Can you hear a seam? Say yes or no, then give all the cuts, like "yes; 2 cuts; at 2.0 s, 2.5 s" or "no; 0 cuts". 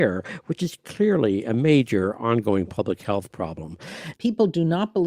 yes; 1 cut; at 4.1 s